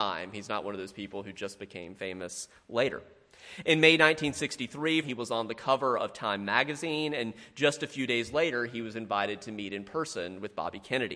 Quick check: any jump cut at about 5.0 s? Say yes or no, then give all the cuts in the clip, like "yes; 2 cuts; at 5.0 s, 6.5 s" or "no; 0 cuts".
yes; 1 cut; at 5.0 s